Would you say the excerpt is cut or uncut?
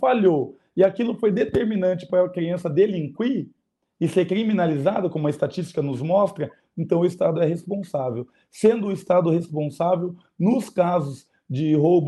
uncut